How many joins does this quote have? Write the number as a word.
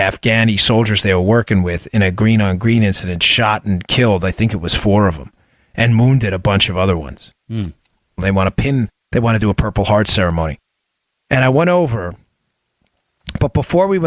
one